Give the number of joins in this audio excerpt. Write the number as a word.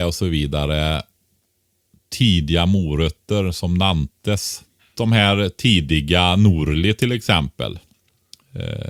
one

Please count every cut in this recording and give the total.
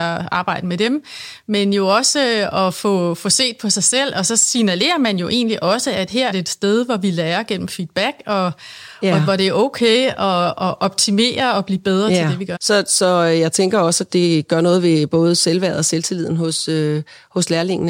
two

